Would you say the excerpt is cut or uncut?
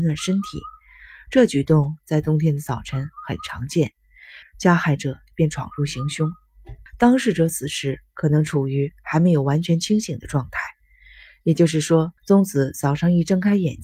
cut